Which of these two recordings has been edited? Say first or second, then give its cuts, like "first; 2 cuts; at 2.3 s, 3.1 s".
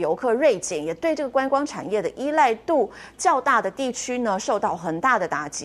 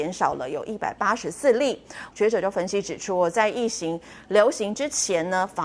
second; 1 cut; at 2.1 s